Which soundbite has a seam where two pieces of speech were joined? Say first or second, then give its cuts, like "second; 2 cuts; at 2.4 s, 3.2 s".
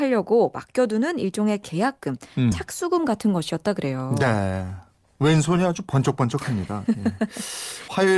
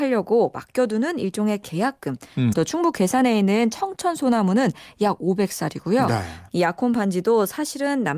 second; 2 cuts; at 2.5 s, 6.5 s